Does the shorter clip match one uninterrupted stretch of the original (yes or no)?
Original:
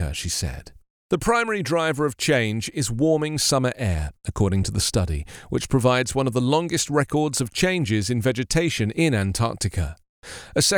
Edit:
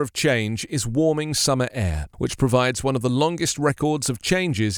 no